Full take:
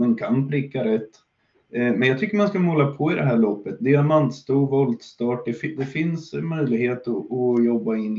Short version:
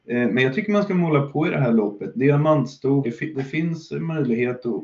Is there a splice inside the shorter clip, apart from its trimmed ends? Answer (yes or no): yes